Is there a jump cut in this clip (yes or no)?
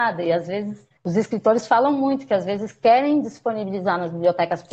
yes